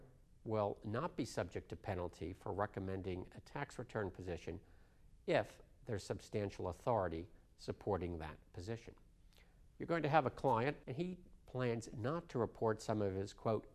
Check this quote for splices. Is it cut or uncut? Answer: cut